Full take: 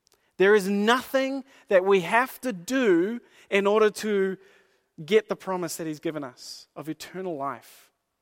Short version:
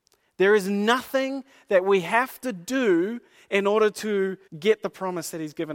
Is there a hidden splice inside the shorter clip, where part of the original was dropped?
yes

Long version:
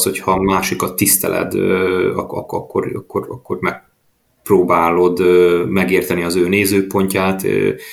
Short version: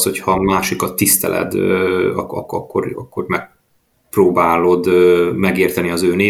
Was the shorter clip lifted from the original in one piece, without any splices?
no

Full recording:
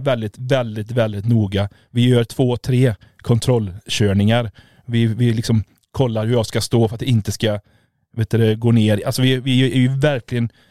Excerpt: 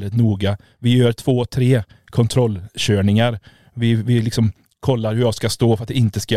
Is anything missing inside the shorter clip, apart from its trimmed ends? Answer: no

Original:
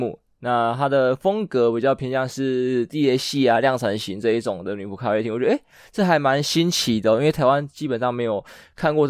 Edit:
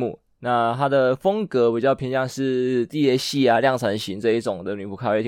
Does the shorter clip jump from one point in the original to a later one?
no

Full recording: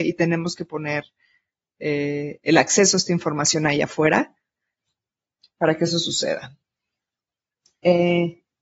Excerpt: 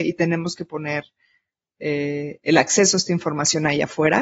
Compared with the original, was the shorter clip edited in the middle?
no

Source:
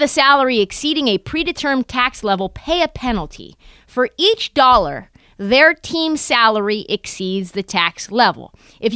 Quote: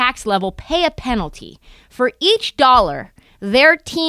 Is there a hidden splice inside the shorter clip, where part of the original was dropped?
no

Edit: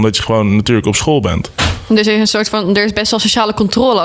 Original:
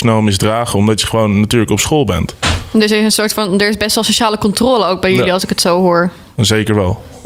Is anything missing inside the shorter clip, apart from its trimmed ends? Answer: no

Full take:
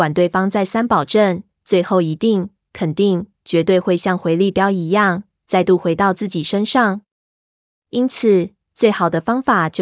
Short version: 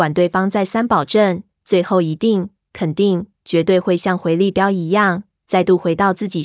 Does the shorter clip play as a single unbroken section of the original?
yes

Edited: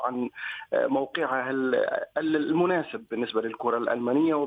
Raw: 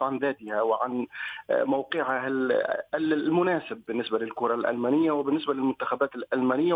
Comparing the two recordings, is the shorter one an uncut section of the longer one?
yes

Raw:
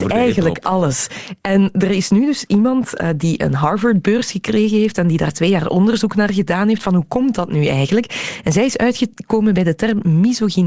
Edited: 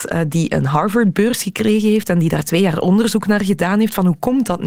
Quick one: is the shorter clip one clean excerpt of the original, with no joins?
yes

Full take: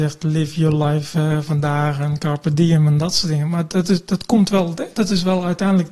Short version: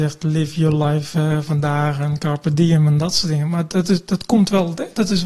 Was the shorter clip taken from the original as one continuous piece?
yes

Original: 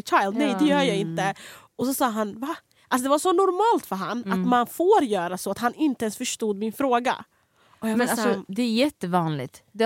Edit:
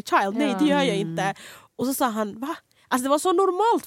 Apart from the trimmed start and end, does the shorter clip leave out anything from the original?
no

